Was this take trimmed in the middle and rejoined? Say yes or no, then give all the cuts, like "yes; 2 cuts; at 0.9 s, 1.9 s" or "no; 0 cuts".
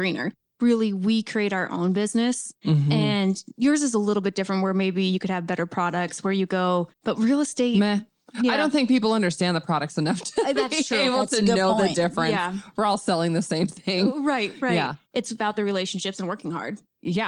no; 0 cuts